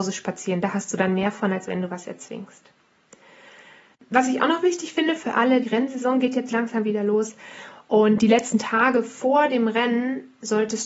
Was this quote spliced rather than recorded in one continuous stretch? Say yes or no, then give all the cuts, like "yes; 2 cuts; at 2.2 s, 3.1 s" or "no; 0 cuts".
yes; 1 cut; at 5.6 s